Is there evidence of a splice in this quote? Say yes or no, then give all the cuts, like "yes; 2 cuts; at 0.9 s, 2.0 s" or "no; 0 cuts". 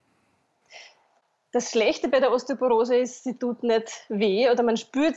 no; 0 cuts